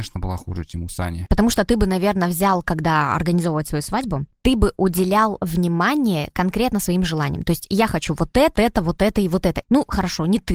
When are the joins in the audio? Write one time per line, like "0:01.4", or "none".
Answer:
0:08.5
0:09.6